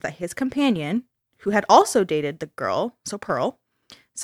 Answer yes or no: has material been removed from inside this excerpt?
no